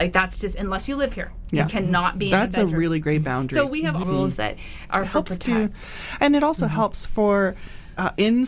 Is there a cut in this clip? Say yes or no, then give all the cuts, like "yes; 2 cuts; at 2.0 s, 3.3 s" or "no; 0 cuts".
yes; 1 cut; at 4.0 s